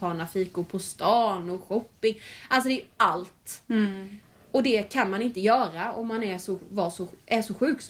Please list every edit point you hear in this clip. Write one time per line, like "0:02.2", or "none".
none